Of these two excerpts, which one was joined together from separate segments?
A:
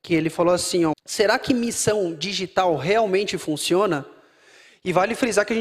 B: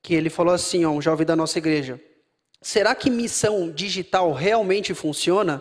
A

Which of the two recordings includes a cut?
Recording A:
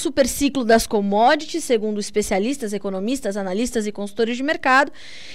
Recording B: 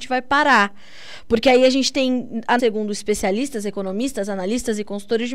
B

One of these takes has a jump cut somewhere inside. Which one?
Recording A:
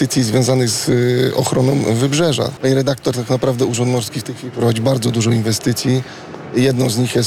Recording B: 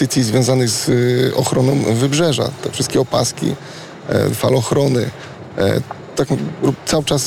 A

